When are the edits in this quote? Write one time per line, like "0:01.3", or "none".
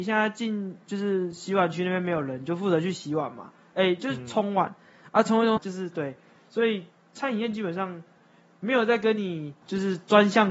0:05.6